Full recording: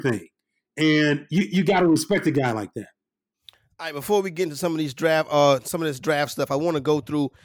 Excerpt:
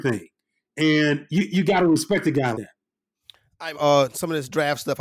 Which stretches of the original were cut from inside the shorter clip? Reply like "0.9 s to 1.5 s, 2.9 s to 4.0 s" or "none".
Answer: 2.5 s to 2.7 s, 3.9 s to 5.2 s

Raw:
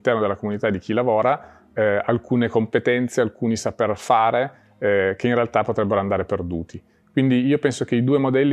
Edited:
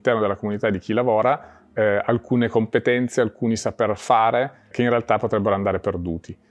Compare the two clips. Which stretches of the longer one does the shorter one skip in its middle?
4.7 s to 5.2 s

